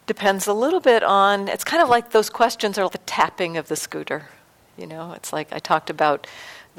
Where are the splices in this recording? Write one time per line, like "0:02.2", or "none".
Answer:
0:02.9